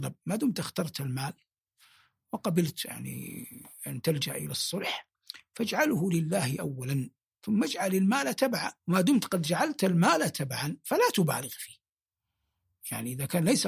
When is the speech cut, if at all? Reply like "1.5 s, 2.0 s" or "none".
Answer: 8.8 s